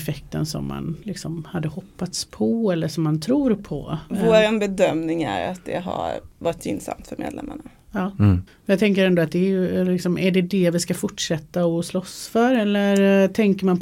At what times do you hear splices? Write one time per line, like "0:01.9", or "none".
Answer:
0:08.5

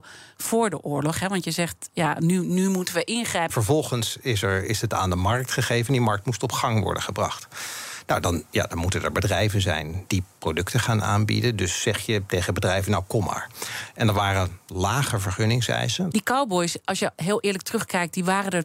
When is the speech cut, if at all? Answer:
0:03.5
0:16.1

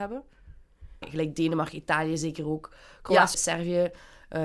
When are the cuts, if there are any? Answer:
0:01.0
0:03.3

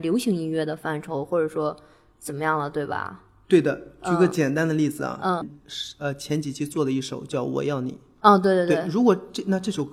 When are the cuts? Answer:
none

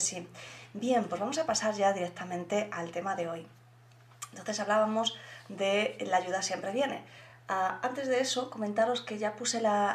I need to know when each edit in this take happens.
none

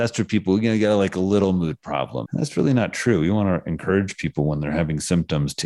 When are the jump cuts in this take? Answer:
0:02.3

